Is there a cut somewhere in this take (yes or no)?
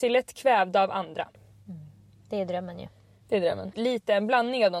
yes